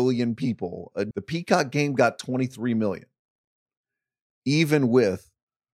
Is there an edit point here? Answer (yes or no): yes